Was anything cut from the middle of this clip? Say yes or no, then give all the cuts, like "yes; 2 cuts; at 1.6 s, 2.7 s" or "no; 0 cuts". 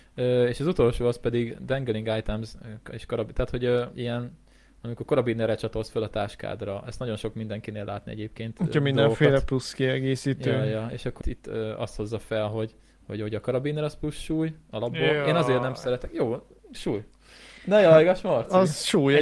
yes; 2 cuts; at 11.2 s, 16.7 s